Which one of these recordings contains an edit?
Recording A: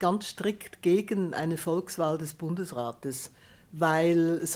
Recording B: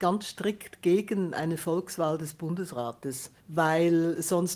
B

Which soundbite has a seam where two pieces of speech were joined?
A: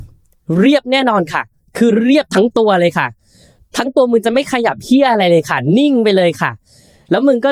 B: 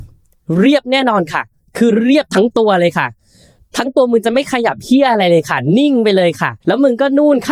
B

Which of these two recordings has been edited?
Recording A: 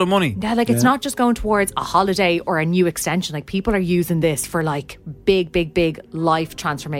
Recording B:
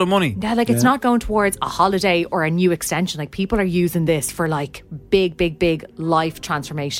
B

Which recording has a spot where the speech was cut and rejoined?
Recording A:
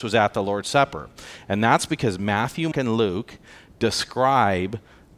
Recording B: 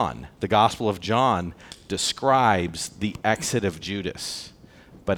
A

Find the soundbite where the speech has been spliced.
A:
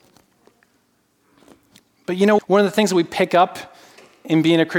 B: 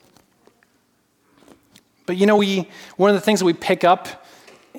A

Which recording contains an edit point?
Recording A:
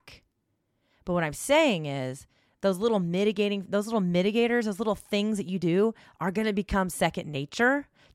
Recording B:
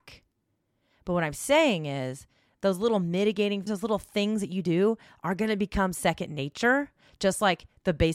B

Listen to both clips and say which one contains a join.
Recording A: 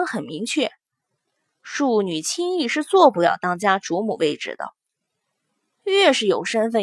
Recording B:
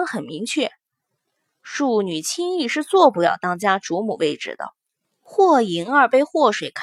B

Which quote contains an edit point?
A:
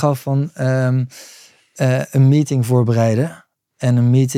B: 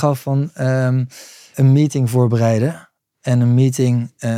B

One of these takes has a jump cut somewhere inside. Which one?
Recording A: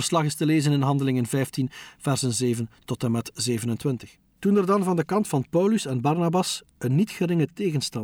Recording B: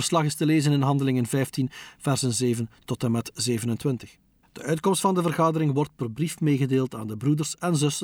A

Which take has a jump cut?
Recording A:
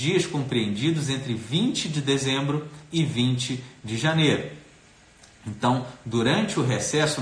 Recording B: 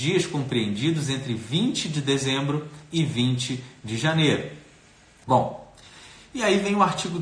B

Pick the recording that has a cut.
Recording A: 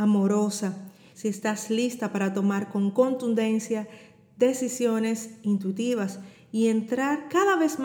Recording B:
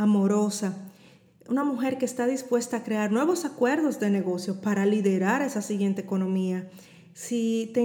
A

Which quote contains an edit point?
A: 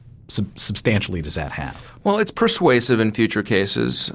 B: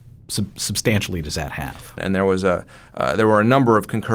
B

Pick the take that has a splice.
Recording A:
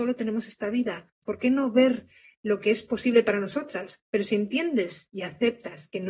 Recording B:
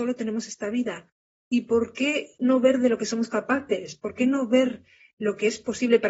A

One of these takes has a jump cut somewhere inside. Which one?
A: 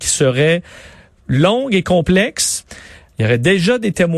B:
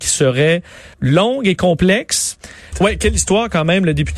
B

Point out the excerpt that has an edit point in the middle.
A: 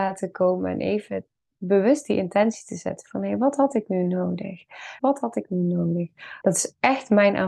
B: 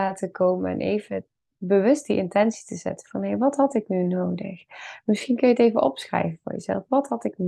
A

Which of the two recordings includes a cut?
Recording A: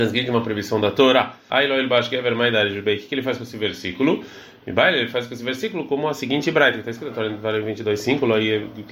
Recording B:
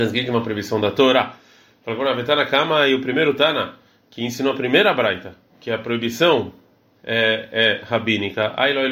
A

